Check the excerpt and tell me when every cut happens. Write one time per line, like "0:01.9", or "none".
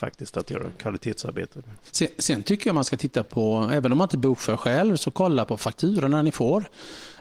none